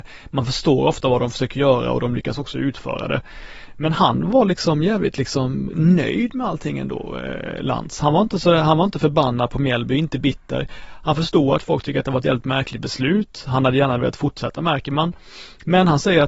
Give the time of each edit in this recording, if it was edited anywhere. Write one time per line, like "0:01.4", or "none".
0:05.7